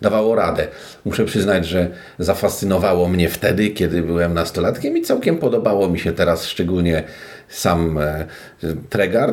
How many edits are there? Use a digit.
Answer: 0